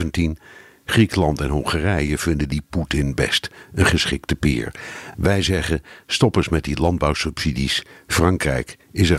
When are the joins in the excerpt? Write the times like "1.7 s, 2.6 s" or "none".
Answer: none